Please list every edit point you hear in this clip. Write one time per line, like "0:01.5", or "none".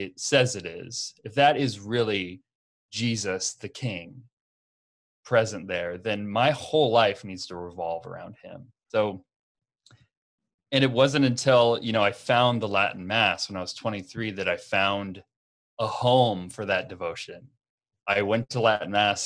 0:08.9

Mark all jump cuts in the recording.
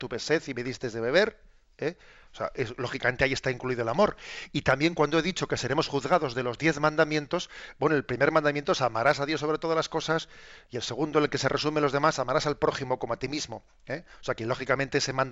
none

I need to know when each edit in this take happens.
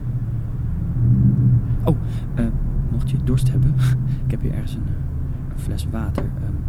none

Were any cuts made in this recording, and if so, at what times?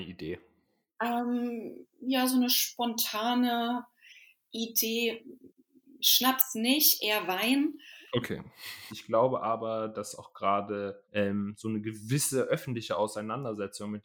0:08.9
0:11.0

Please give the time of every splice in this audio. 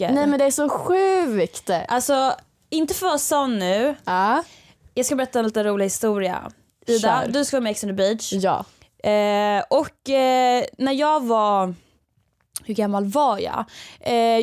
none

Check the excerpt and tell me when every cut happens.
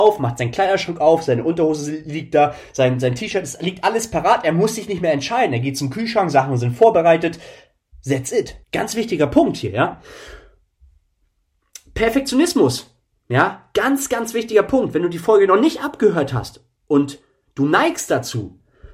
0:08.6

